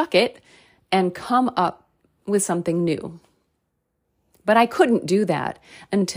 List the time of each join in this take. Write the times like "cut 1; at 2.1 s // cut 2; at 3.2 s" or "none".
none